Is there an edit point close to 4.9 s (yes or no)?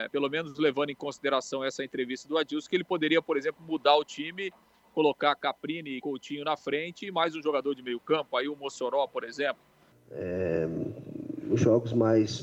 no